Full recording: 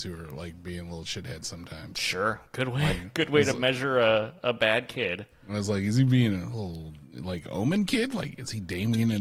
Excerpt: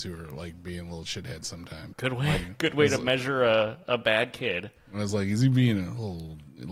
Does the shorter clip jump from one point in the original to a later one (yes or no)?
yes